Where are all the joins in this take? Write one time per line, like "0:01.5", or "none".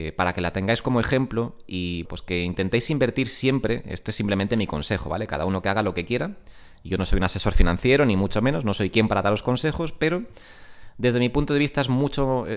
0:02.0

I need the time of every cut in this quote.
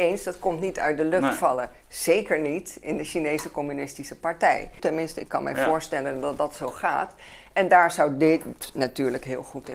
0:04.8

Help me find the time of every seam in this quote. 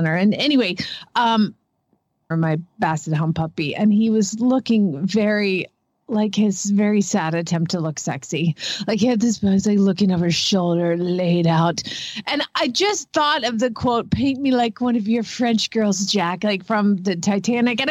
0:02.3

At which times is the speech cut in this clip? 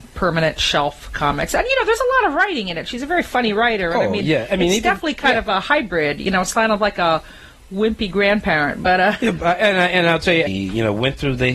0:09.2
0:10.5

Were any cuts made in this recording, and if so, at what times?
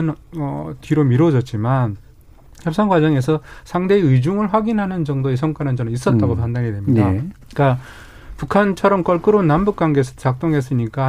0:07.5

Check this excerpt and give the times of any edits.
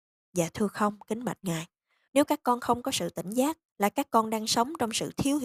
0:02.1
0:03.7

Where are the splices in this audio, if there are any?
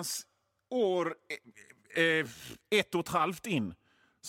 none

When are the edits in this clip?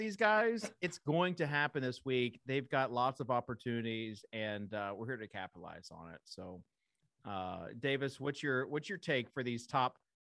none

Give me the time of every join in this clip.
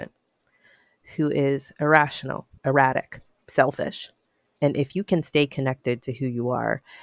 0:02.5
0:04.5

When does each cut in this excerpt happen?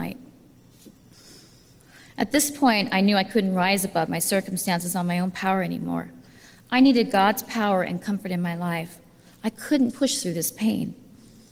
0:09.9

